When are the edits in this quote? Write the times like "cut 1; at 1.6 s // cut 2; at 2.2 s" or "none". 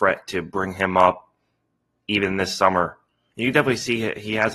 cut 1; at 3.3 s